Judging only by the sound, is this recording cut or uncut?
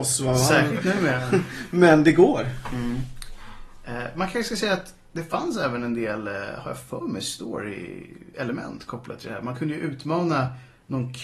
uncut